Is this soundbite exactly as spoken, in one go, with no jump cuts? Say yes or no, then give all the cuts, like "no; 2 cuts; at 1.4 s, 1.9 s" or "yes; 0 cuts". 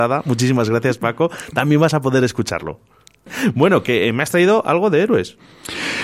no; 1 cut; at 3.3 s